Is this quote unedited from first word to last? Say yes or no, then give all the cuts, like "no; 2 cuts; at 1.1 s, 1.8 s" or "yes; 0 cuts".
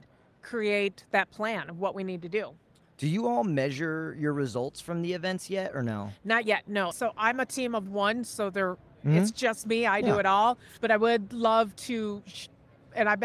no; 1 cut; at 6.9 s